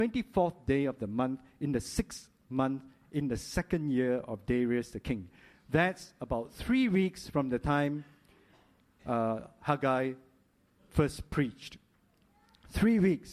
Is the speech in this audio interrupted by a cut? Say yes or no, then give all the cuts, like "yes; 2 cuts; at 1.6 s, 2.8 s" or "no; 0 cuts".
no; 0 cuts